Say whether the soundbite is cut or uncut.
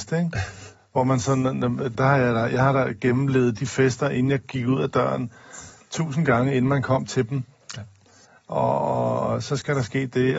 cut